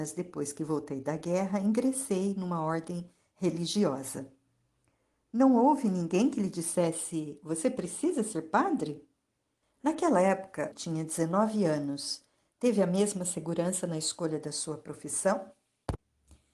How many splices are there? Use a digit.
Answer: 2